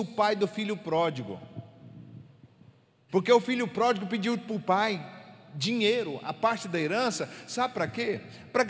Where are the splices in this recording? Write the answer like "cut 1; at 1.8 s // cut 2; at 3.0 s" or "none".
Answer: cut 1; at 3.1 s

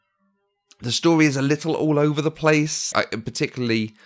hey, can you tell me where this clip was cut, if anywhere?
cut 1; at 2.9 s

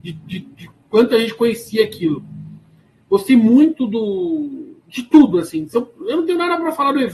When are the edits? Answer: cut 1; at 4.8 s

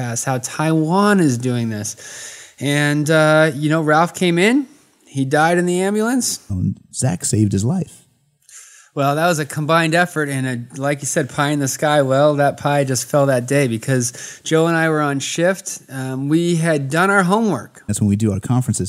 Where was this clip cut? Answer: cut 1; at 6.5 s // cut 2; at 17.9 s

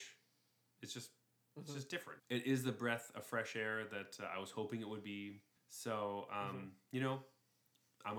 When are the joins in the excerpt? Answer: cut 1; at 2.2 s // cut 2; at 5.6 s

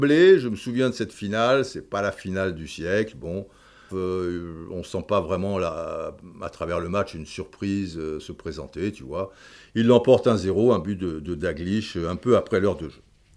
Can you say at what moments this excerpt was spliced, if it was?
cut 1; at 3.9 s

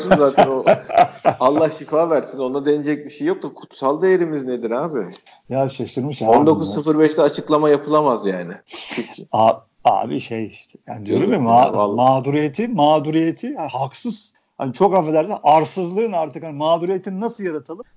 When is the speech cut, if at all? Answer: none

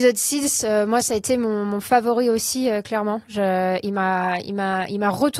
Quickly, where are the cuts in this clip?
none

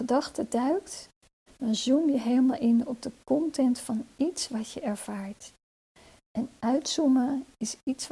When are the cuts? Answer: cut 1; at 1.5 s

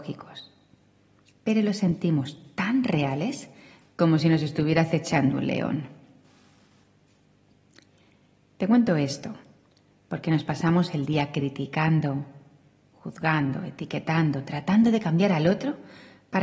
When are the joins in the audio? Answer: none

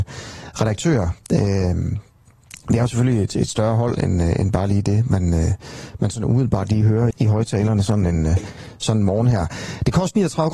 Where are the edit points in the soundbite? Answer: cut 1; at 7.1 s

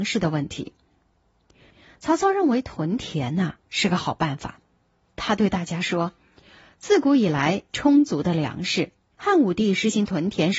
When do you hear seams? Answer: cut 1; at 7.7 s // cut 2; at 9.1 s

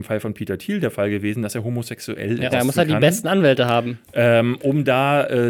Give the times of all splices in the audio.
cut 1; at 2.5 s

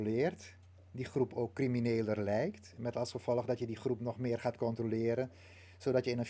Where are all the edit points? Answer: none

